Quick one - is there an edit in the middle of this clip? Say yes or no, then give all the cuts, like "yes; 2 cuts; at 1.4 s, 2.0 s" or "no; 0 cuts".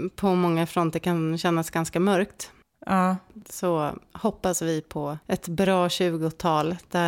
yes; 1 cut; at 5.2 s